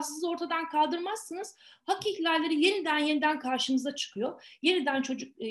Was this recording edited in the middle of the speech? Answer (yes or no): no